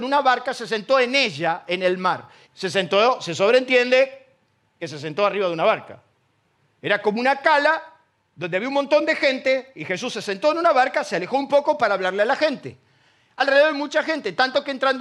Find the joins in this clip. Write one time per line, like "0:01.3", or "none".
0:02.4